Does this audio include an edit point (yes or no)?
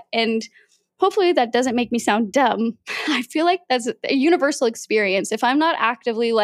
no